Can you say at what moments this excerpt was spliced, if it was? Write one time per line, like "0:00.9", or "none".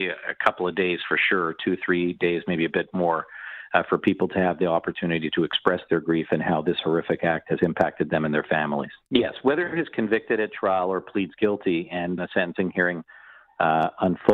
0:09.1
0:12.2